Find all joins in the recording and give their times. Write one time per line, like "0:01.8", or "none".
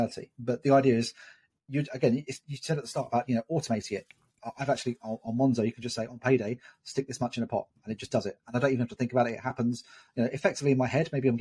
none